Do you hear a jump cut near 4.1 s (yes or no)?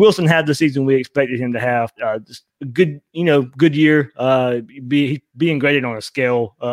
no